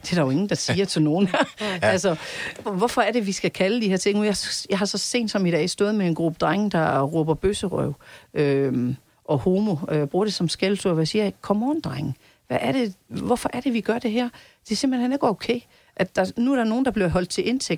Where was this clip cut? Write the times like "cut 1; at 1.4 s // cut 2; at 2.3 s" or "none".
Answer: cut 1; at 2.6 s